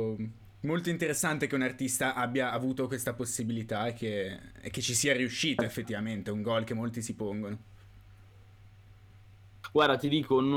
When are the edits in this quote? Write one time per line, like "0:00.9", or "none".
none

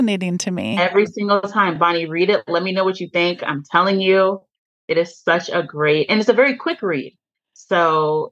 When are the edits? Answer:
none

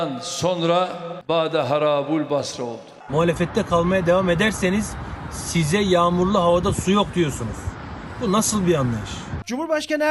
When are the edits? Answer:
0:03.1

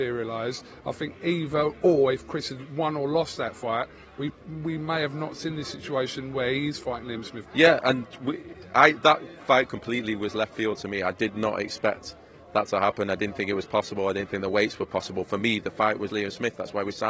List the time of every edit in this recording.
0:07.4
0:16.1

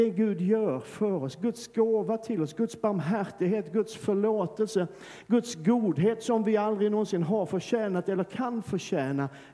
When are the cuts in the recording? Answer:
none

